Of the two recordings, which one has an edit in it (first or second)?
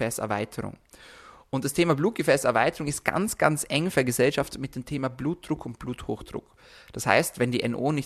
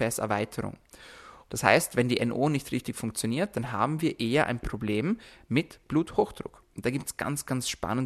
second